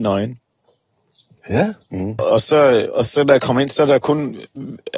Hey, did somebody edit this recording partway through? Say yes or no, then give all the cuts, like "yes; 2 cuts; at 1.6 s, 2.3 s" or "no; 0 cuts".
yes; 1 cut; at 2.2 s